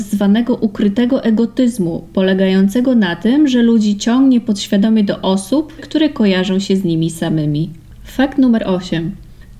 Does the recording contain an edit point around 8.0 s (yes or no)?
no